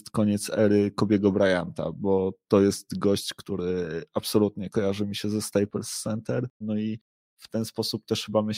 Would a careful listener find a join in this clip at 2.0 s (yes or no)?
no